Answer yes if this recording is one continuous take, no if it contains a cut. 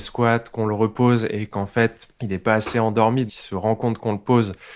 no